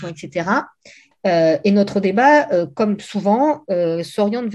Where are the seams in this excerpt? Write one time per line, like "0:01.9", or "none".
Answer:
0:01.1